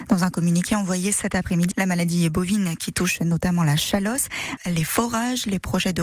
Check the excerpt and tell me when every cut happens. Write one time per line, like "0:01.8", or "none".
0:01.7
0:04.6